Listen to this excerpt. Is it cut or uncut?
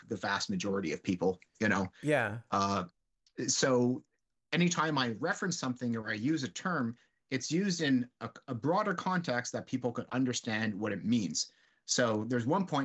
uncut